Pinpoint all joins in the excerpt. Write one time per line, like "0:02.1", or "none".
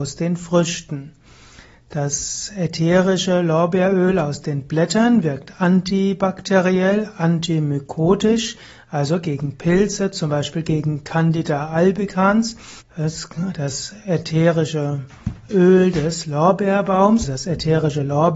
0:12.8
0:17.2